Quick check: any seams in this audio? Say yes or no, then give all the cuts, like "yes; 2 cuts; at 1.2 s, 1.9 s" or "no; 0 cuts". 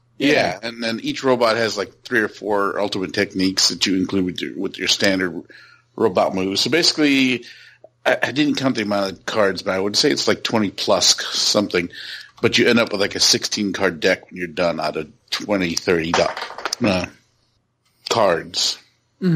no; 0 cuts